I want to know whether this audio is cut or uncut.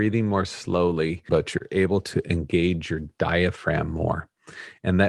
cut